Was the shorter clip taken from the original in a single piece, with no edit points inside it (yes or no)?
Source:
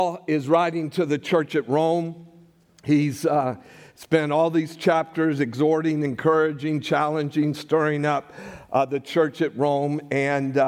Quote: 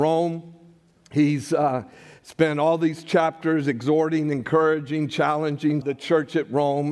no